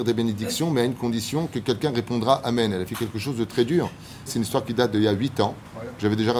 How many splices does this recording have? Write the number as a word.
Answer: one